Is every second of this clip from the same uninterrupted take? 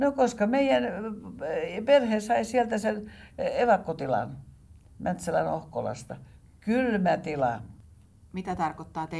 yes; 0 cuts

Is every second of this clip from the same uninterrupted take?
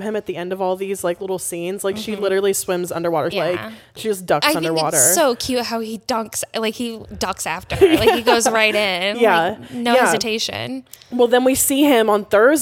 no; 1 cut; at 3.3 s

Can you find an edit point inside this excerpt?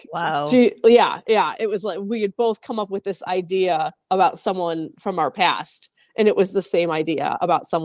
no; 0 cuts

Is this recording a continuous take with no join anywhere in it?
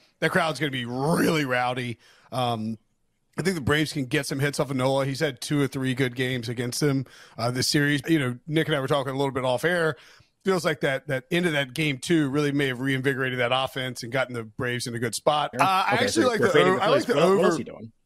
no; 2 cuts; at 8.0 s, 15.5 s

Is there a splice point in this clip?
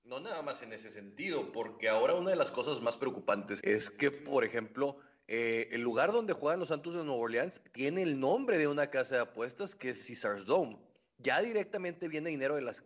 yes; 1 cut; at 3.6 s

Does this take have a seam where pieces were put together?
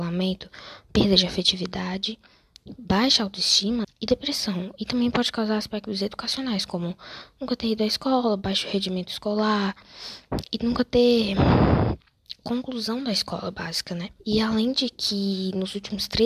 yes; 2 cuts; at 3.8 s, 14.2 s

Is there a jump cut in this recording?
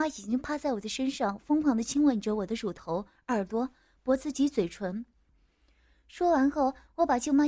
yes; 1 cut; at 5.3 s

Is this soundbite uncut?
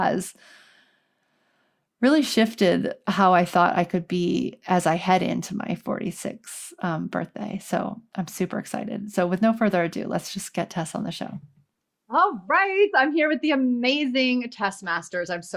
yes; 0 cuts

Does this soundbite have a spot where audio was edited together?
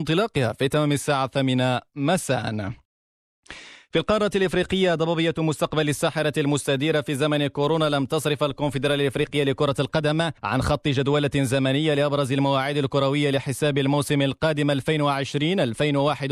yes; 1 cut; at 10.4 s

